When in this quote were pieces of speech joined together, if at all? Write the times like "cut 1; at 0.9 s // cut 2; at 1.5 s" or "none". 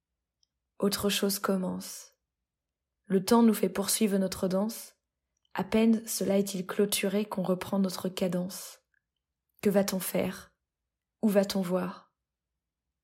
none